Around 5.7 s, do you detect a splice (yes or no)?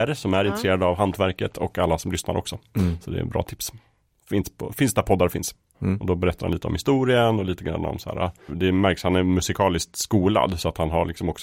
yes